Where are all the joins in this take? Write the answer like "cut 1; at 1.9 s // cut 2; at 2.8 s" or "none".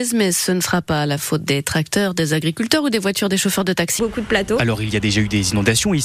cut 1; at 4.0 s